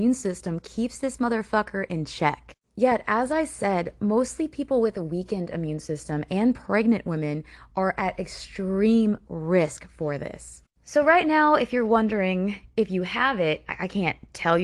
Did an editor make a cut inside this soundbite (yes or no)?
no